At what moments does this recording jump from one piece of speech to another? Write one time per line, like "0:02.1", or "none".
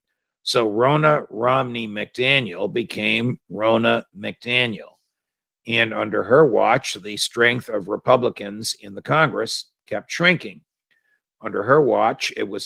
none